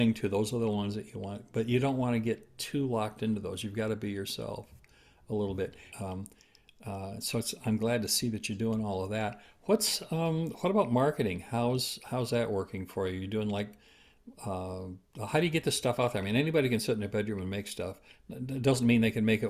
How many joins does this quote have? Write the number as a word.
one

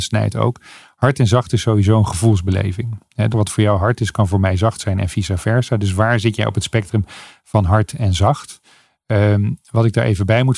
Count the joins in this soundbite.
one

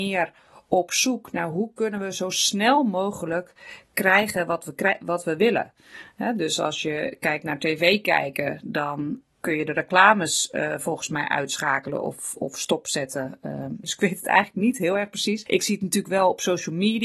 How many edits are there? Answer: one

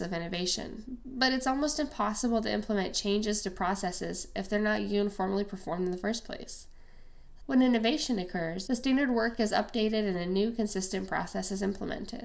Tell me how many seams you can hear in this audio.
two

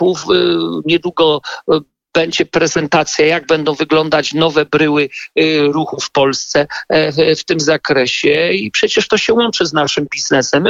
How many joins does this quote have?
zero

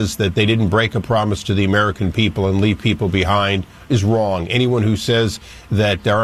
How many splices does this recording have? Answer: zero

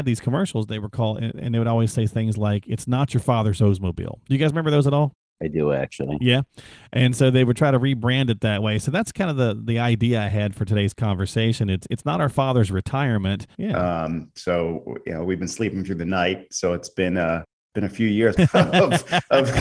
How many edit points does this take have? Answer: two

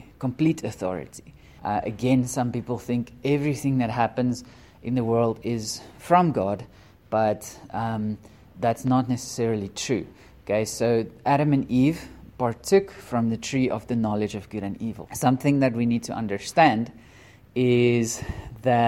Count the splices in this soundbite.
two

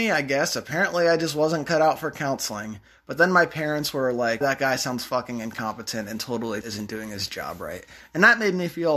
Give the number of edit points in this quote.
two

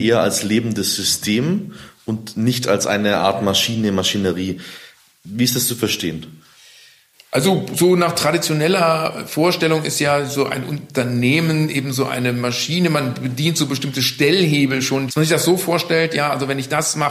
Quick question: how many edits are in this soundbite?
one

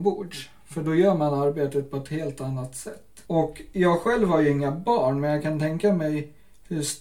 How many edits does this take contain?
one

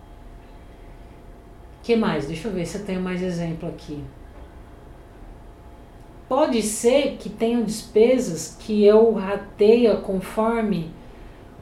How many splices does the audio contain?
one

